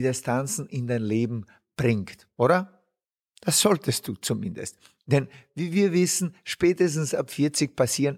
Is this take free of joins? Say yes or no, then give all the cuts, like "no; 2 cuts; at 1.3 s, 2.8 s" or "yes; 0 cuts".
yes; 0 cuts